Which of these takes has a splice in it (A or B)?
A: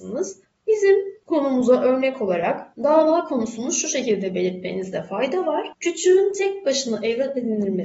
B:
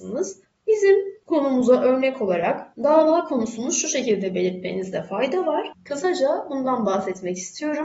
B